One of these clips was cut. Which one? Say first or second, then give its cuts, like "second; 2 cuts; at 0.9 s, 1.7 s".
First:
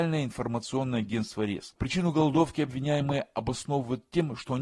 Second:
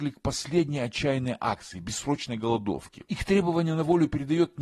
first; 1 cut; at 1.8 s